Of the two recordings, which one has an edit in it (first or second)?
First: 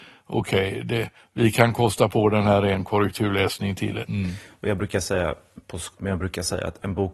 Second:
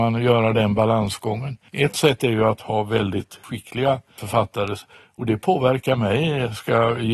first